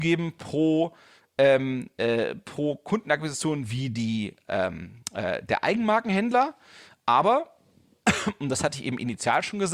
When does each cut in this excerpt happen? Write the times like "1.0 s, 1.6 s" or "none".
none